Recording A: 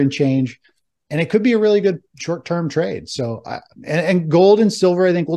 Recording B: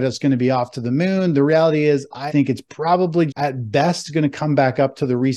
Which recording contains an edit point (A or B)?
B